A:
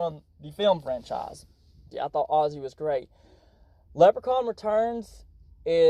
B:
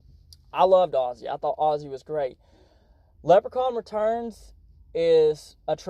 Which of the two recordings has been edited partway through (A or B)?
A